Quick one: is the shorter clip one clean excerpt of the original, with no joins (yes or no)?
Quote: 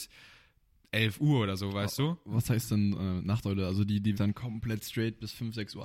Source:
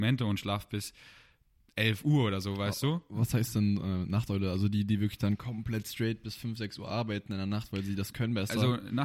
no